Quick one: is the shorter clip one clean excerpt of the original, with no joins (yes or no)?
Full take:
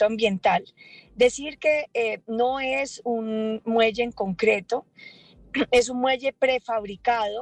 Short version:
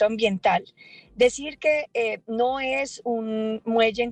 yes